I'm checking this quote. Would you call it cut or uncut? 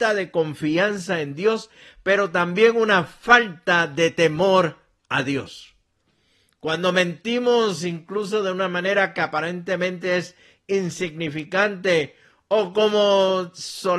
uncut